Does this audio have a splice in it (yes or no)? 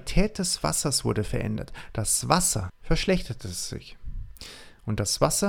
yes